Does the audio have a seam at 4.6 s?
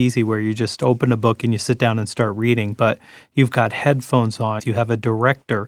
yes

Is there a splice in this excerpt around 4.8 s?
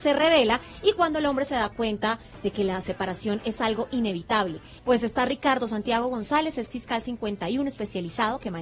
yes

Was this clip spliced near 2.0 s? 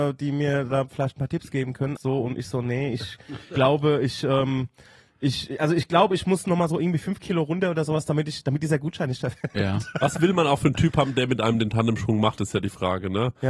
yes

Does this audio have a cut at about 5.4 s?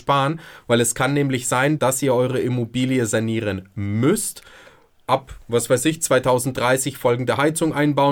no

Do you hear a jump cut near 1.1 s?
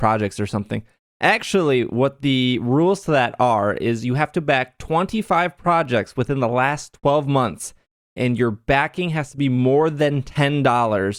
no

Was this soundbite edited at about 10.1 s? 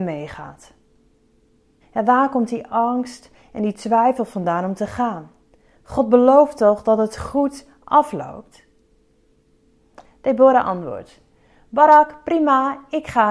no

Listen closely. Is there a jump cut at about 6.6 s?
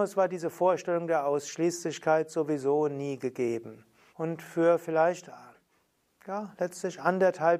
no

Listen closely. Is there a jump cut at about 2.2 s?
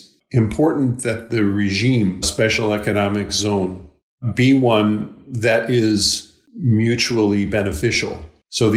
yes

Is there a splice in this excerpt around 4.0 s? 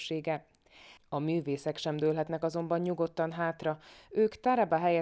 no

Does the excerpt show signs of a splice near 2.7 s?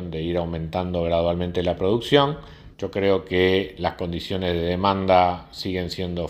yes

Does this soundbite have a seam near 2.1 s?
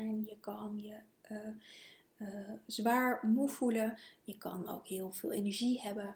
no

